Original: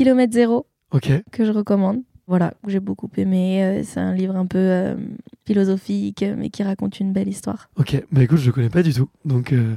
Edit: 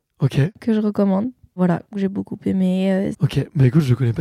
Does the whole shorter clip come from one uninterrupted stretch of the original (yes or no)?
no